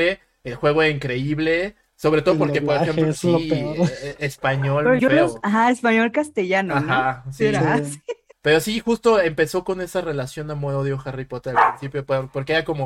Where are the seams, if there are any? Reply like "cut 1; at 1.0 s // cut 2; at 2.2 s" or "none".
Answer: cut 1; at 1.9 s // cut 2; at 5.0 s // cut 3; at 8.3 s